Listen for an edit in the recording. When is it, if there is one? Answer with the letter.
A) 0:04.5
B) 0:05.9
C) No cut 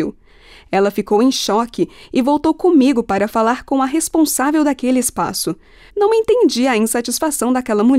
B